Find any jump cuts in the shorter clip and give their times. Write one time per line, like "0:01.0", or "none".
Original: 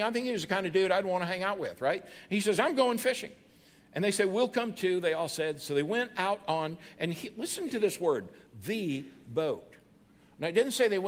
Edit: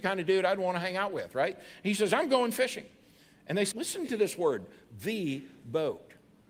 0:03.7